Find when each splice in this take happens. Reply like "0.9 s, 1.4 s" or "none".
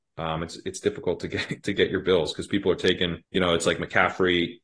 3.2 s